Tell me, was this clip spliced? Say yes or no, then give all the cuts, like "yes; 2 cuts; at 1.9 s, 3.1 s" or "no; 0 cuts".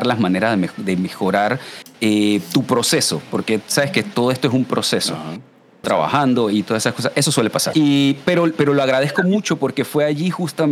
yes; 2 cuts; at 5.8 s, 7.7 s